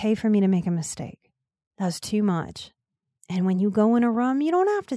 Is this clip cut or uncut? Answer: cut